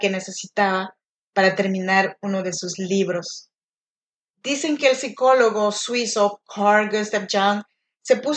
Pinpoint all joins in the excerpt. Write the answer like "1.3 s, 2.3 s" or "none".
4.3 s